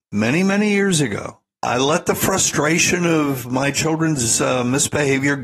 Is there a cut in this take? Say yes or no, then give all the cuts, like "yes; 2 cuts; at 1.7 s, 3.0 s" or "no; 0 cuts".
yes; 1 cut; at 1.6 s